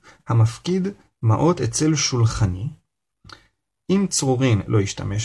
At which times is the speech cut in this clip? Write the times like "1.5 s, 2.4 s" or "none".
none